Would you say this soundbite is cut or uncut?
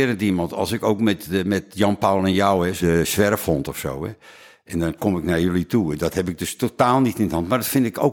cut